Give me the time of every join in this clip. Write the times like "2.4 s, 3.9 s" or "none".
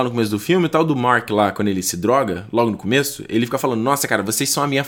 none